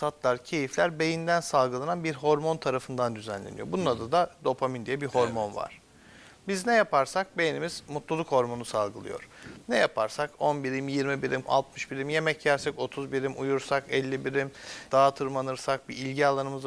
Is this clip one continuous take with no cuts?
no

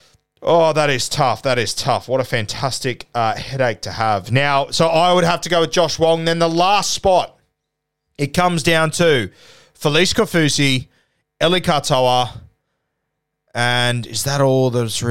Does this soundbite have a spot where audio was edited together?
no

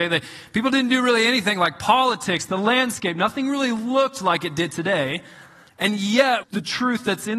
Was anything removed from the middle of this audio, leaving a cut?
yes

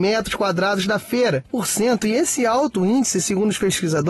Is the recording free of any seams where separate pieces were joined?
no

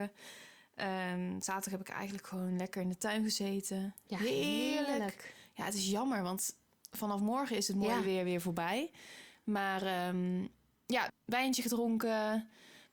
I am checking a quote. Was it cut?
yes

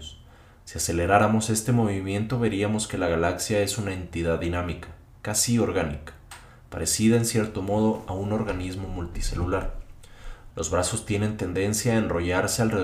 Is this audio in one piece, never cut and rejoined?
no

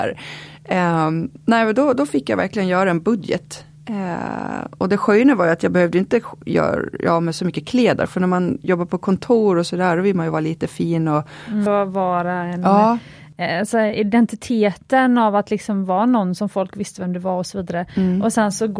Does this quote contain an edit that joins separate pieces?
yes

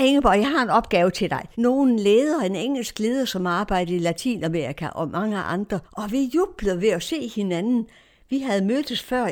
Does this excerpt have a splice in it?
yes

